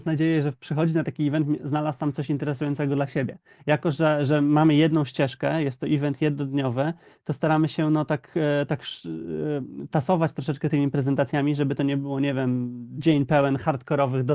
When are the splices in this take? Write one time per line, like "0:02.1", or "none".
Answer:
none